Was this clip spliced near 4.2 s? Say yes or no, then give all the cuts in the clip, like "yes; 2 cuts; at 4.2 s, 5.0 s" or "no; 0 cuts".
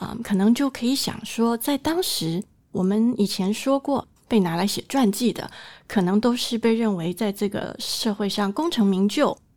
yes; 1 cut; at 4.2 s